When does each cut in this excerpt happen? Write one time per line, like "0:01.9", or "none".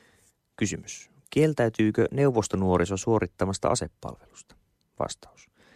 none